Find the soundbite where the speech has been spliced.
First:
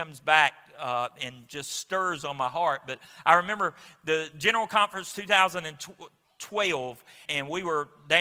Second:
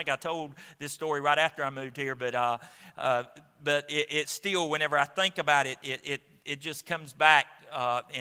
first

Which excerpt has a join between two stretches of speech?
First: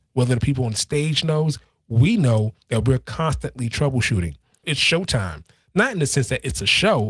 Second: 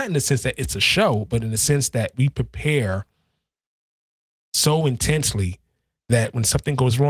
first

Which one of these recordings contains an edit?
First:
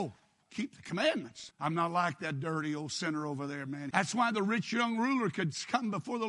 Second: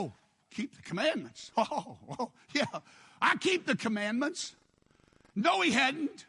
first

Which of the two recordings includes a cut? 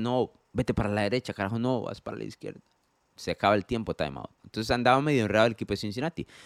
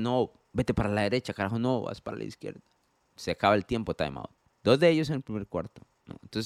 first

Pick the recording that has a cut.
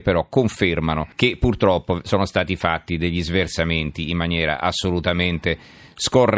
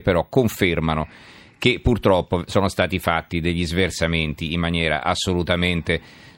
first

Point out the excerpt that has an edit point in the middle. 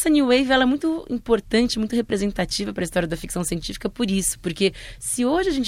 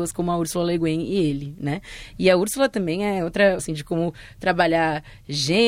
second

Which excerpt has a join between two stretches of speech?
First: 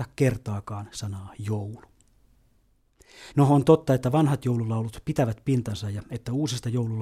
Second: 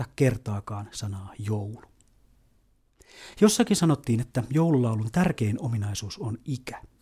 first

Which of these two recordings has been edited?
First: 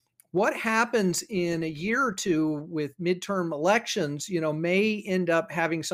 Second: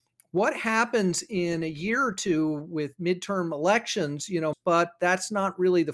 second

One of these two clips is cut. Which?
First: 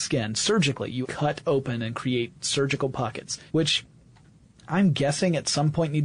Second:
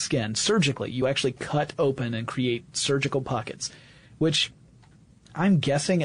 first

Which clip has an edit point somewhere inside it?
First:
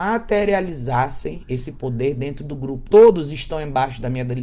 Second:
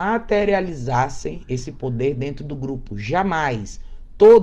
first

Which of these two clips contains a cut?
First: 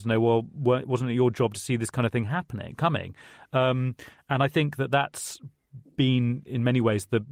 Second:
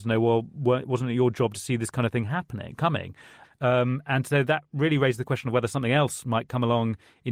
second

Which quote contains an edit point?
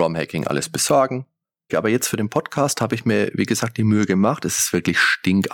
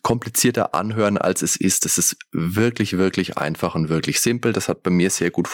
first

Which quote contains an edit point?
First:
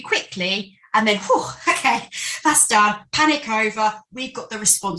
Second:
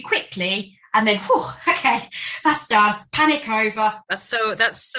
second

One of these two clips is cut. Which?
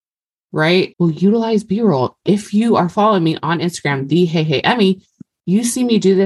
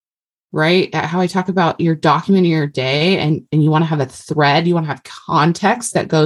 first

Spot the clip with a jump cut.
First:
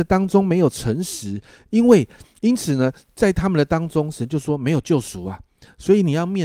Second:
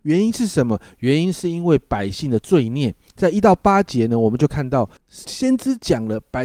second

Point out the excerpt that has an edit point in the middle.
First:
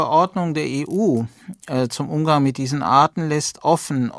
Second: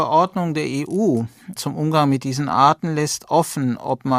second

